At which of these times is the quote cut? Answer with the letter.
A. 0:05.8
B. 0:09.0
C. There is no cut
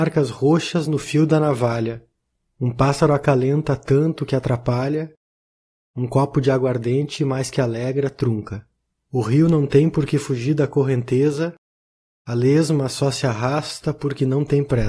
B